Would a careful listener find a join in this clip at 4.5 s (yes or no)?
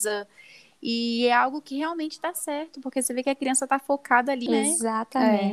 yes